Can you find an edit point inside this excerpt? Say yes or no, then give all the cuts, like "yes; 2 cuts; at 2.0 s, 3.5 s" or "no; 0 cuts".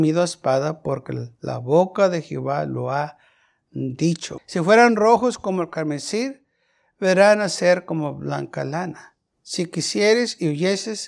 yes; 1 cut; at 4.4 s